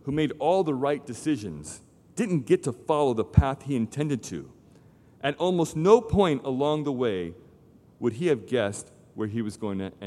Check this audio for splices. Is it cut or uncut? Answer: uncut